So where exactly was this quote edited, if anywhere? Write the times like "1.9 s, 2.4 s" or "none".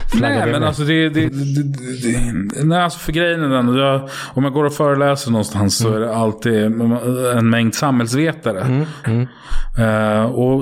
1.3 s, 9.0 s

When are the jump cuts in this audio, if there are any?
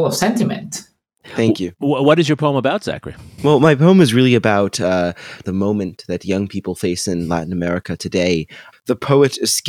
5.4 s, 8.7 s

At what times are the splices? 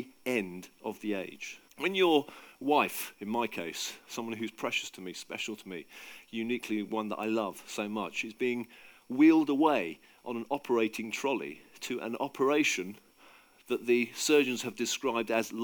1.7 s

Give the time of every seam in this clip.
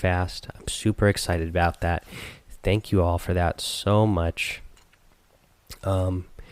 none

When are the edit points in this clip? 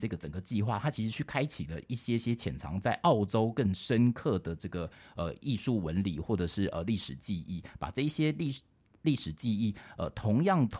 none

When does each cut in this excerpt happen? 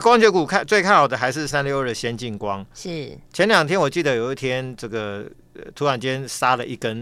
1.5 s

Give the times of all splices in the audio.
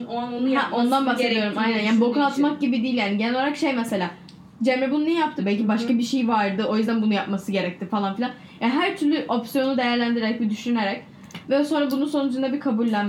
5.4 s

